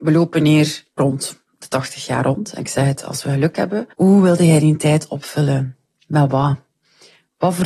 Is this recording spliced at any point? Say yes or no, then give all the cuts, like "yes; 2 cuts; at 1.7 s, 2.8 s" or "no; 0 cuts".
yes; 2 cuts; at 1.0 s, 3.9 s